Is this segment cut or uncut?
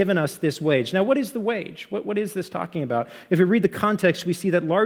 uncut